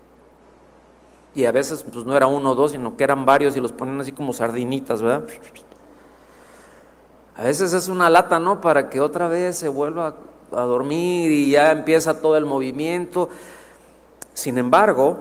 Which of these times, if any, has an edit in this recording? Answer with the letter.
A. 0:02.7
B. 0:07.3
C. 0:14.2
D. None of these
B